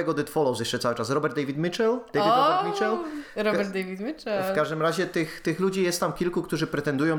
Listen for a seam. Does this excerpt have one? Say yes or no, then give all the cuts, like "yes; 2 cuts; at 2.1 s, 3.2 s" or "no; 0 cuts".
no; 0 cuts